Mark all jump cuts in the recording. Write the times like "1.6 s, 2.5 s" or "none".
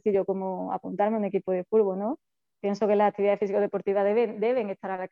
none